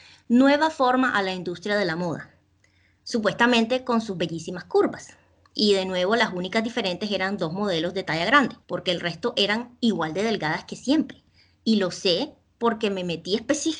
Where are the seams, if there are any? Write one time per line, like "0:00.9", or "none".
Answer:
0:08.6